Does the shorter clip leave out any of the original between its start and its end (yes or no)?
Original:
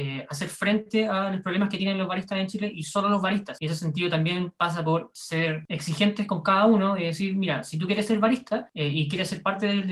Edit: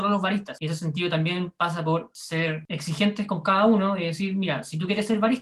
no